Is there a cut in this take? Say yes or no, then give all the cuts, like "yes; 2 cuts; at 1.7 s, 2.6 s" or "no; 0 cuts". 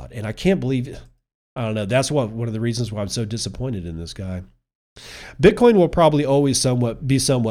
no; 0 cuts